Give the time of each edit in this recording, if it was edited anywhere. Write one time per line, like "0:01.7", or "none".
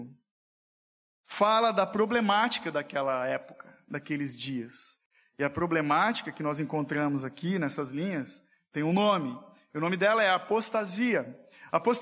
none